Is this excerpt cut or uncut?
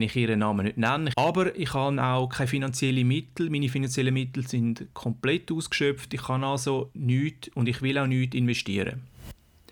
cut